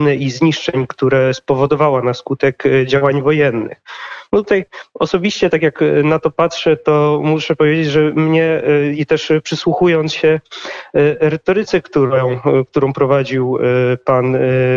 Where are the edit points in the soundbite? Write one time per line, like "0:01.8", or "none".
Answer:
none